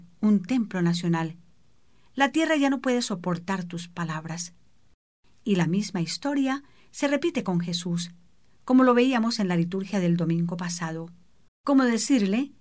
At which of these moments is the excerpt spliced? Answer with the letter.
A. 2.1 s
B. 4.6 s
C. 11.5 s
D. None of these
C